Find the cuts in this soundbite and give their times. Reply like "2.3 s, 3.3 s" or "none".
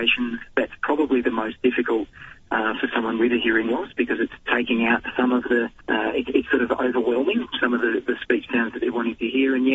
5.8 s